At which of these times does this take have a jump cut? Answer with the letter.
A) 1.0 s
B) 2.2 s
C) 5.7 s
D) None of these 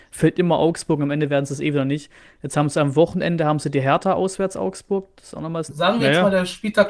C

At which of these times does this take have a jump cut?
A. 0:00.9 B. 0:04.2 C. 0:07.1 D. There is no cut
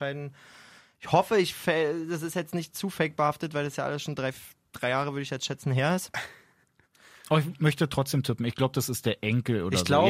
D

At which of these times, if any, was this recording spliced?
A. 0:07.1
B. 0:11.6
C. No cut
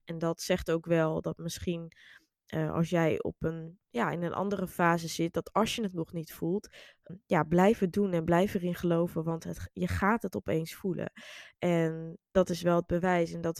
A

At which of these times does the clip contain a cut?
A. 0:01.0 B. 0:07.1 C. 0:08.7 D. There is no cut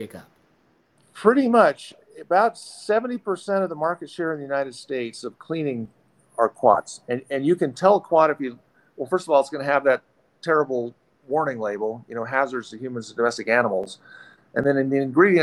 D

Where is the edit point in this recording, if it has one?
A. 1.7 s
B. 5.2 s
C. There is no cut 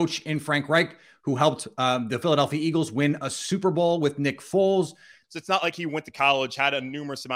B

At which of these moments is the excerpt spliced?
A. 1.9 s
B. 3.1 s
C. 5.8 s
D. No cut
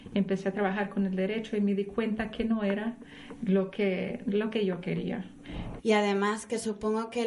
C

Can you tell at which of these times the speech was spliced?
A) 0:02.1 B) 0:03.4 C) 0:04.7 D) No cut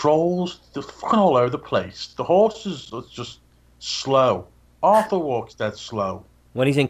D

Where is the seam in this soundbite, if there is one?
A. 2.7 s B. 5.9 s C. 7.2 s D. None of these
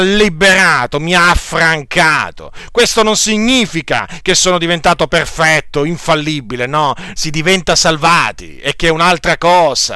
C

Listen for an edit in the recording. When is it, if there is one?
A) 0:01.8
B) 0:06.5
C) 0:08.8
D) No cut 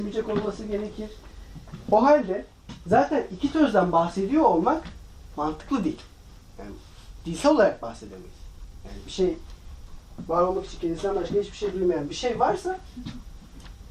A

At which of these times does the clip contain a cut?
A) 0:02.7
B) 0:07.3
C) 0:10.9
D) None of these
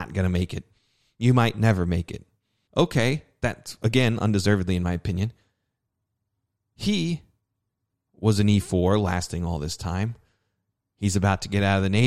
A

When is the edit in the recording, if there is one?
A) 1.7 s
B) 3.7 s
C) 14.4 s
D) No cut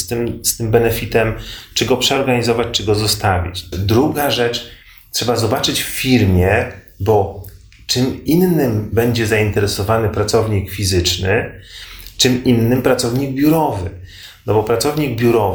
B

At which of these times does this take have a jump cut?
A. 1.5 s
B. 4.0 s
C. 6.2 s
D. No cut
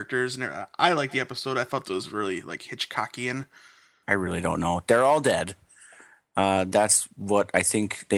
B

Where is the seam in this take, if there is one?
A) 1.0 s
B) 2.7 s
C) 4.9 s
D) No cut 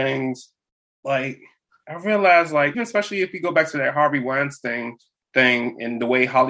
B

